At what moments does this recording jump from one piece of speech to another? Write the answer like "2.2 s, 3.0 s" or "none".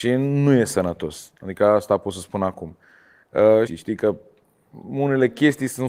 3.7 s